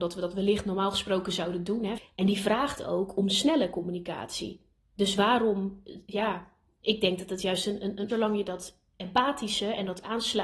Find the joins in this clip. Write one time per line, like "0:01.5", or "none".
0:02.0
0:08.1